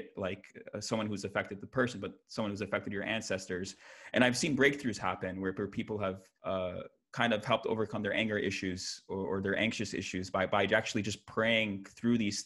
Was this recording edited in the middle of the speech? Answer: yes; 1 cut; at 6.3 s

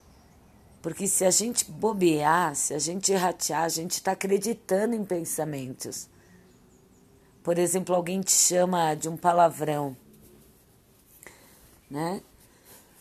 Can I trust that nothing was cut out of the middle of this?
yes; 0 cuts

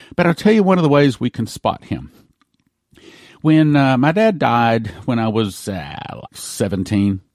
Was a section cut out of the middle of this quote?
yes; 1 cut; at 6.3 s

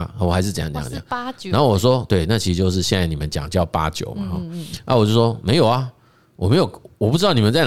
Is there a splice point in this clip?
no; 0 cuts

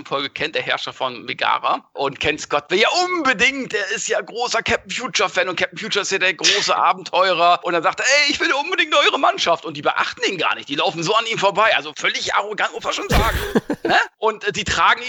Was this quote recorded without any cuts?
yes; 0 cuts

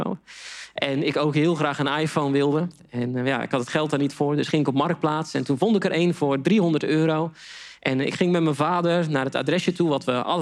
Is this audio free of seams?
yes; 0 cuts

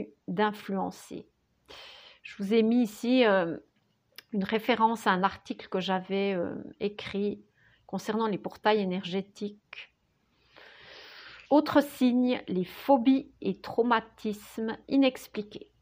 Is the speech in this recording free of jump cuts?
no; 1 cut; at 11.5 s

